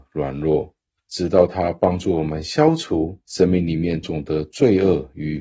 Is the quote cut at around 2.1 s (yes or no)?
no